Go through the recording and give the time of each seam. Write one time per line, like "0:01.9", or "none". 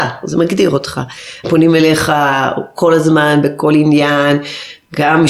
0:01.4